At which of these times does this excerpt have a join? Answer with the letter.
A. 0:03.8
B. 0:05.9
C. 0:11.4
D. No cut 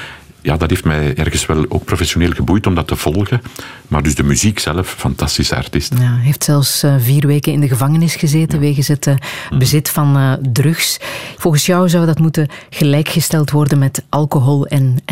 C